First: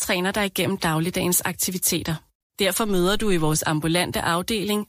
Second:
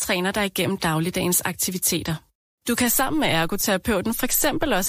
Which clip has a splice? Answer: first; 1 cut; at 2.4 s

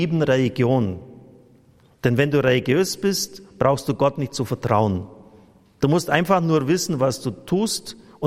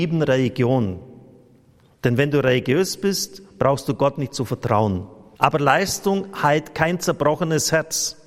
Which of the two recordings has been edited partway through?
second; 1 cut; at 5.4 s

